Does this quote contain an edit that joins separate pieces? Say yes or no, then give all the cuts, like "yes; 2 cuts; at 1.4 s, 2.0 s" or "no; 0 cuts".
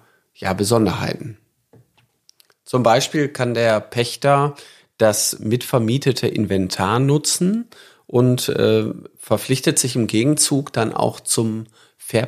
no; 0 cuts